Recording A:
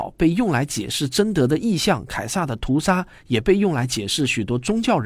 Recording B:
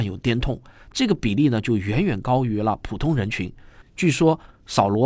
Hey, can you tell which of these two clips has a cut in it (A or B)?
B